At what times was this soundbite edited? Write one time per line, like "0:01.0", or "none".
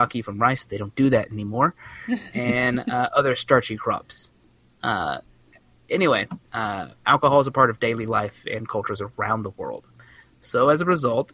0:06.4